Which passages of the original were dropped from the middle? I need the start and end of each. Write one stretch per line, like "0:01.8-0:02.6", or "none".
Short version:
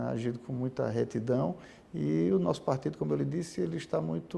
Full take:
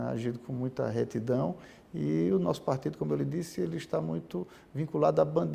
none